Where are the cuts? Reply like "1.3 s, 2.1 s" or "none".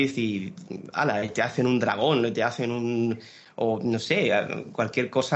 none